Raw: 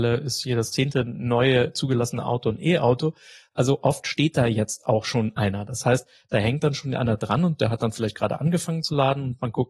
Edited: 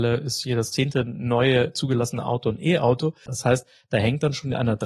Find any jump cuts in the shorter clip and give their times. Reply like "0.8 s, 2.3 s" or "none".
3.3 s